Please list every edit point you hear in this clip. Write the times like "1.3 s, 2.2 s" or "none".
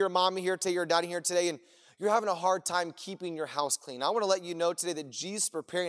none